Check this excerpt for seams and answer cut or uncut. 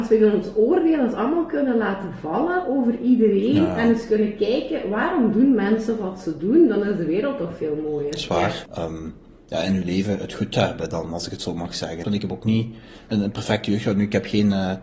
cut